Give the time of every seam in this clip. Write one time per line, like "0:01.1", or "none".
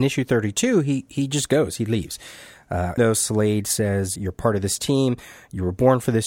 0:03.0
0:04.2